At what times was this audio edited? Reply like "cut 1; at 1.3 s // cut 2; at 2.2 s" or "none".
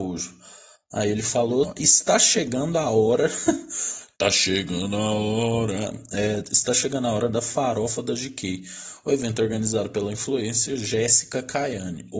cut 1; at 1.6 s